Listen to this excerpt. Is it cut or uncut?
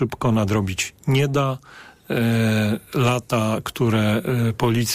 uncut